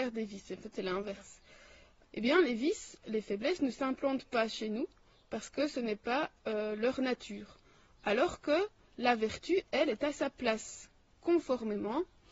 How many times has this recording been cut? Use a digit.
1